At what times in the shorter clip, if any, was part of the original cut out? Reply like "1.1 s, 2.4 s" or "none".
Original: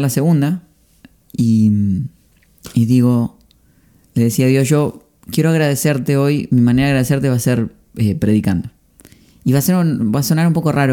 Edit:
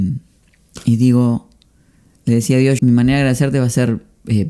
2.8 s